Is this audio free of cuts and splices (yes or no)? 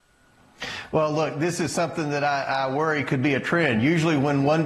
yes